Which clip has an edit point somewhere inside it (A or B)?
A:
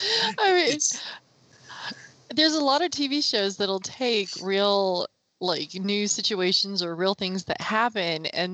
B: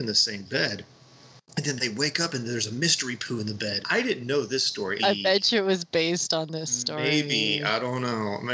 B